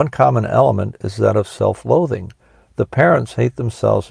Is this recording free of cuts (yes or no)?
yes